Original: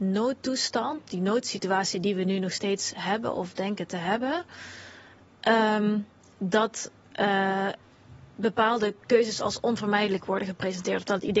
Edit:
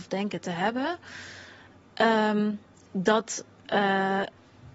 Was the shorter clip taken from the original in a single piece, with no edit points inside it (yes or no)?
yes